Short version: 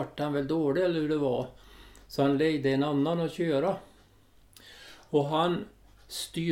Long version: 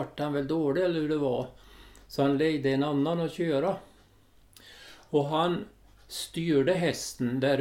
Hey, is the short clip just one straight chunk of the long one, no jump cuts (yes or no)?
yes